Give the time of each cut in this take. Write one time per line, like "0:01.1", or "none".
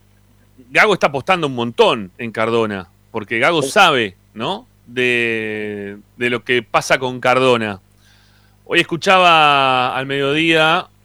none